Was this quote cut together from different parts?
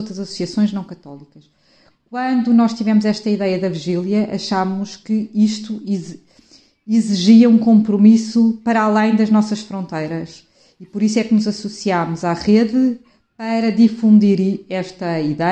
no; 0 cuts

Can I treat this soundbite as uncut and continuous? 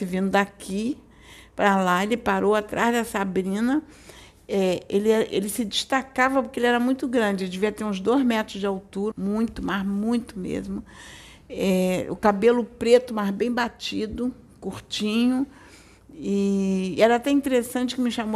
no; 1 cut; at 9.1 s

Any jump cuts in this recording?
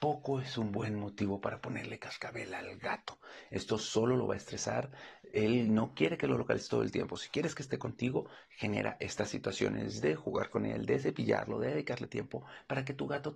no; 0 cuts

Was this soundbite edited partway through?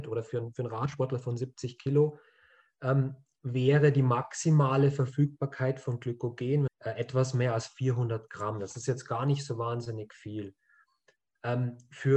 yes; 1 cut; at 6.7 s

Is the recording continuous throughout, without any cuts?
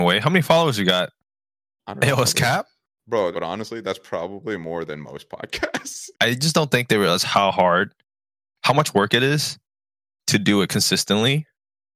no; 2 cuts; at 3.3 s, 6.1 s

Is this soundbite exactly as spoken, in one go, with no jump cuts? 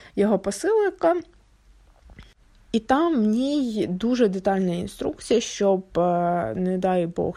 yes; 0 cuts

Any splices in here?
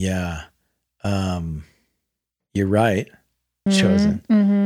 yes; 1 cut; at 3.7 s

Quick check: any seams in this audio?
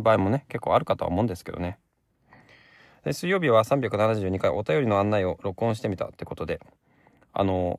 no; 0 cuts

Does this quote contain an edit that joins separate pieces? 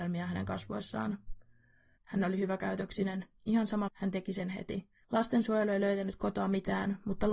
yes; 2 cuts; at 2.0 s, 3.9 s

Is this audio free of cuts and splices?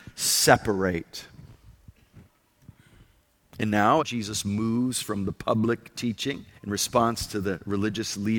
no; 2 cuts; at 4.0 s, 6.5 s

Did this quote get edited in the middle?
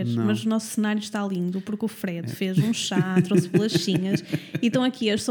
no; 0 cuts

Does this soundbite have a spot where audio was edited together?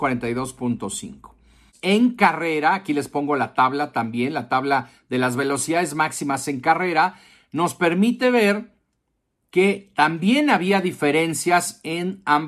no; 0 cuts

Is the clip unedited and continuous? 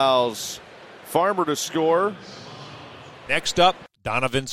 no; 1 cut; at 3.3 s

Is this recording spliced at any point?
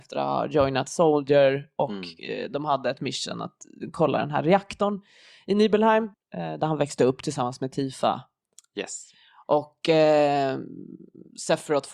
yes; 1 cut; at 6.1 s

